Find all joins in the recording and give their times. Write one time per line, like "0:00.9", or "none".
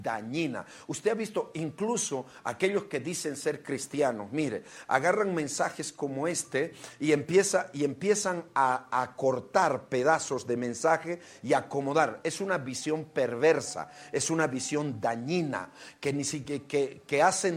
none

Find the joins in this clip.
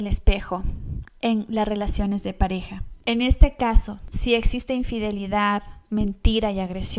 none

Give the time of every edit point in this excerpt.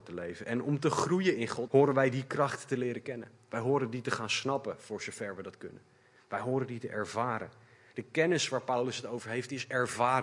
0:01.7

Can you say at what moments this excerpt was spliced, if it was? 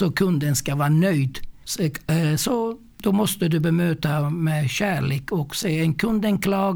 0:01.6

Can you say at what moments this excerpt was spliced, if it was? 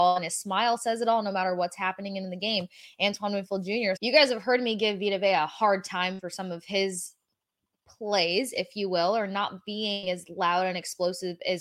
0:04.0

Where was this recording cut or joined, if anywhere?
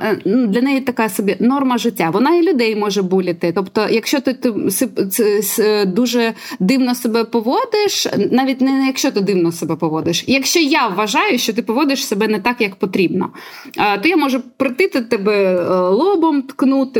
none

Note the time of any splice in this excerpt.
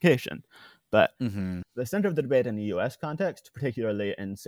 0:01.6

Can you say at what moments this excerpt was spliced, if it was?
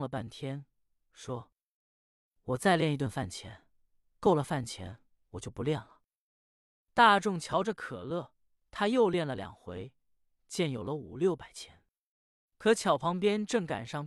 none

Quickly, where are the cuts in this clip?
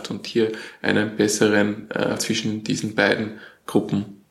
0:02.2

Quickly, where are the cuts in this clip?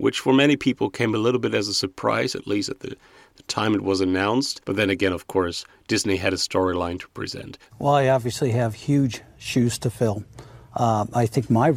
0:07.7
0:10.7

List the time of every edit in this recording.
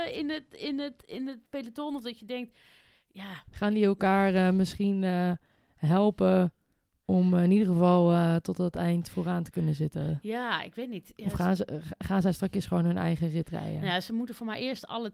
0:01.5

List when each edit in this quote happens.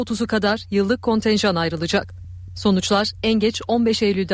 0:02.5

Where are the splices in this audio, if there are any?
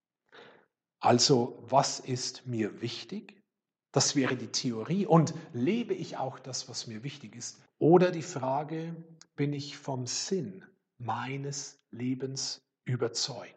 0:07.7

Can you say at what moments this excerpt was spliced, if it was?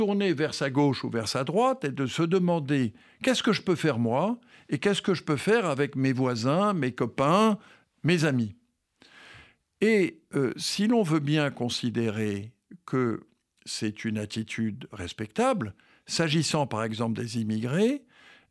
none

